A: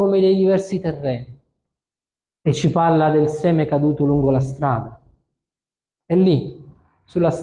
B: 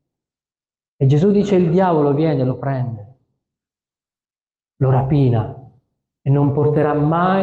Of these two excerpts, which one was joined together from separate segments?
A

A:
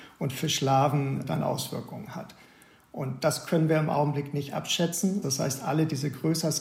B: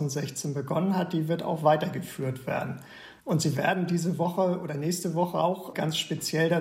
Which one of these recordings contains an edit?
A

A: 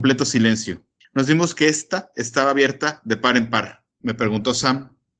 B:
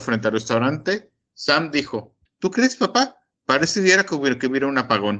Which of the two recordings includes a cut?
A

